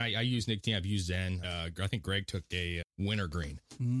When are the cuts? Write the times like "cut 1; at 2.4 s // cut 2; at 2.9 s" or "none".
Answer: cut 1; at 1.4 s // cut 2; at 2.8 s